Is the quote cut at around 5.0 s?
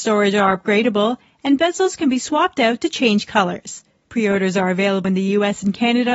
yes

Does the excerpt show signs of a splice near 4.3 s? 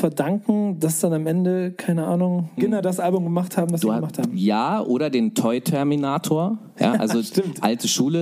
no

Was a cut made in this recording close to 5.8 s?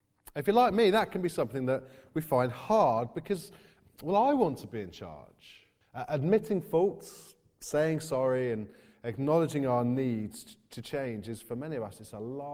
yes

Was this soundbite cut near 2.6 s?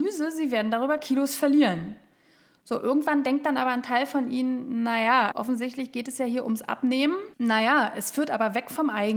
no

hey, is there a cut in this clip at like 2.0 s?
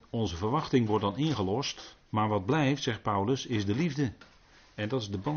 yes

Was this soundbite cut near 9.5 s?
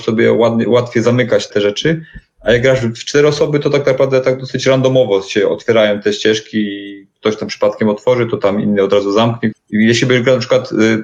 yes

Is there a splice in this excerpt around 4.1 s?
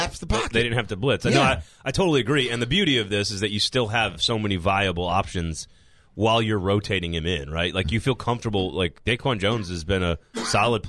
no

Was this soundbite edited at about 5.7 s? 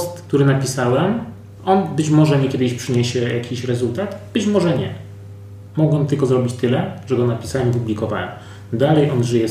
no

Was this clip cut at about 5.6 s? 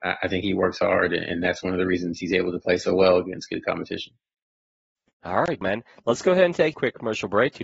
yes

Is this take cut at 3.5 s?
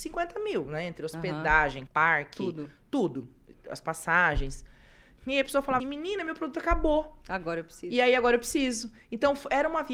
no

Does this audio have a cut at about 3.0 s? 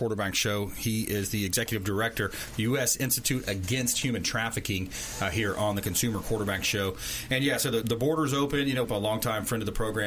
no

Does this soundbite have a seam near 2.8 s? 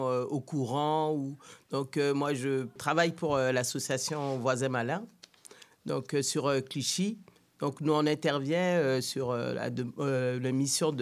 yes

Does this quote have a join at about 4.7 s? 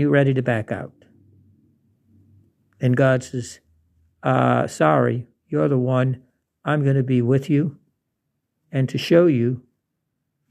no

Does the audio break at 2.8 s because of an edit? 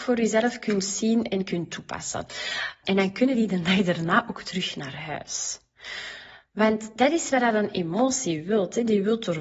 yes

